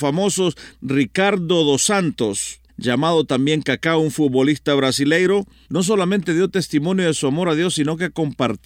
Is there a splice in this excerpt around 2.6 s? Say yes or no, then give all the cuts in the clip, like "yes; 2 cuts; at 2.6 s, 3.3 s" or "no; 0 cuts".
no; 0 cuts